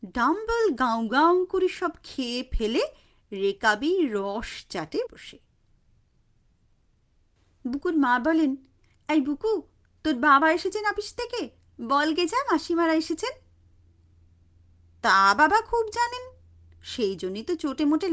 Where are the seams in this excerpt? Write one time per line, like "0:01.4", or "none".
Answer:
0:05.1